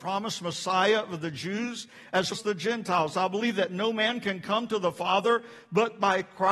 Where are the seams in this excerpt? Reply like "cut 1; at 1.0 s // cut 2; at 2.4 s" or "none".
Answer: cut 1; at 2.3 s

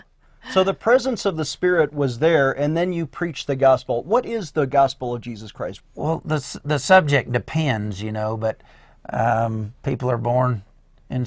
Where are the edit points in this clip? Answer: cut 1; at 5.8 s

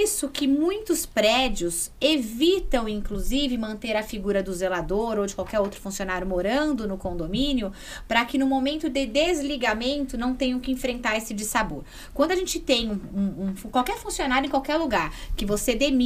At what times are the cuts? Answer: none

